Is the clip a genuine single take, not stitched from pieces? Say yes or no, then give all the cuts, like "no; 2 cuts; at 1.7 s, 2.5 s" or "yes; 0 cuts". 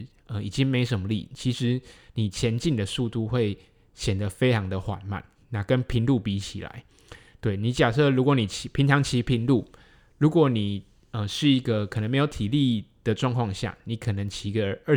yes; 0 cuts